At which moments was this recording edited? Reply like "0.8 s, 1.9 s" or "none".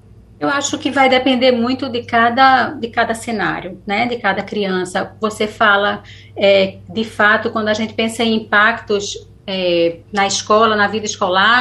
10.0 s